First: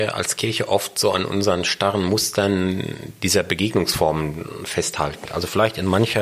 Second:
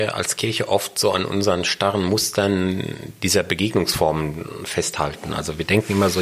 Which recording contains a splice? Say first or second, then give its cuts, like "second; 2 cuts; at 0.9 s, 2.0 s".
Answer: first; 1 cut; at 5.3 s